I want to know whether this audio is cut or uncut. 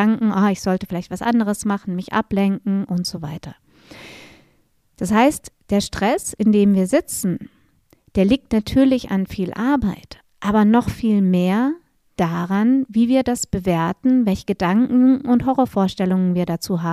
uncut